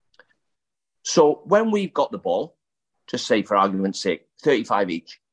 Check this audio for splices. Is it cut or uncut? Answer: cut